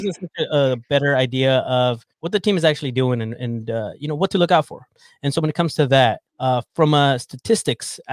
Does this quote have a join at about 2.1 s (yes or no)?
yes